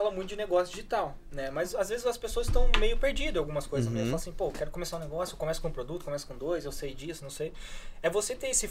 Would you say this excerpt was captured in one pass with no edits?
yes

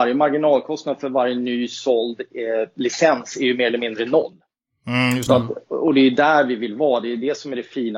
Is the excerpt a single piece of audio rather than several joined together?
yes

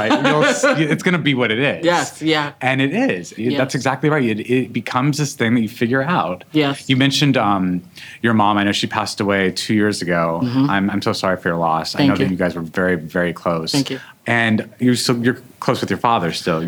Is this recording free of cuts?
yes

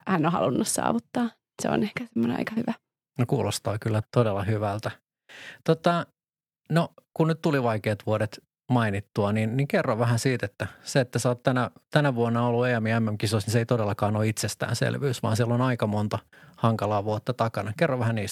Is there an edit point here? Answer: yes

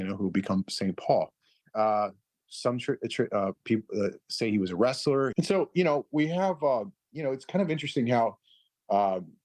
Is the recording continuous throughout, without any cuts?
no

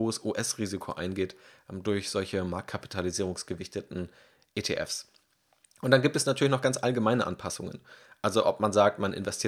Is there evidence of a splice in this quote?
no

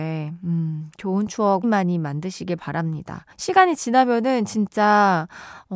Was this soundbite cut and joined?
yes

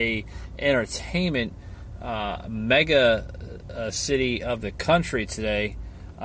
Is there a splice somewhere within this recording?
no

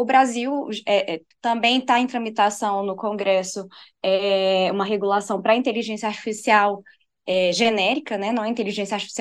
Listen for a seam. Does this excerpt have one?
yes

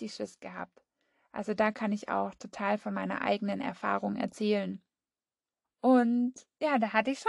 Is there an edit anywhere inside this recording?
yes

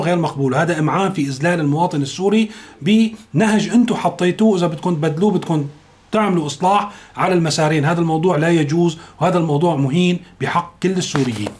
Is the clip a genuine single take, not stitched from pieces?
yes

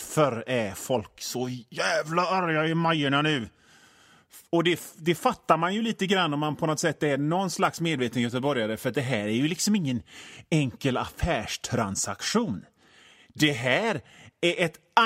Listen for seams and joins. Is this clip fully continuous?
no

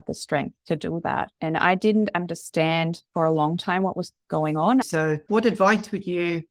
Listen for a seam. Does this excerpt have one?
yes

